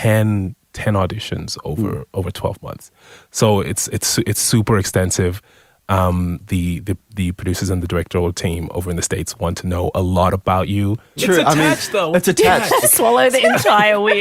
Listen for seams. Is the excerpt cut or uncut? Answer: cut